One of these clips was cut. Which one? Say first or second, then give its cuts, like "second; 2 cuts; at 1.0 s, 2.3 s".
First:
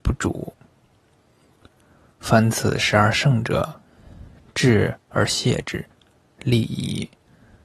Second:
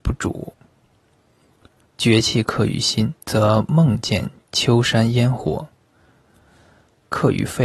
second; 2 cuts; at 1.8 s, 3.2 s